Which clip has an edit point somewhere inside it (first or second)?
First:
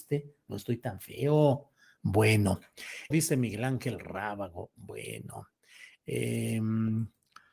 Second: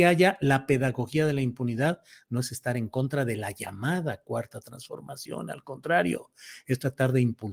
first